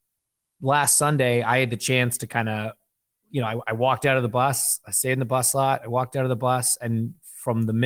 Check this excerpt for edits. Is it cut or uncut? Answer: uncut